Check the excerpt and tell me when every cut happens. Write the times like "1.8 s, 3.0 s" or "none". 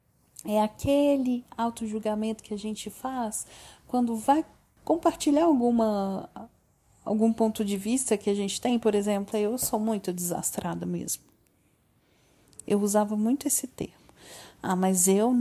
4.8 s, 9.3 s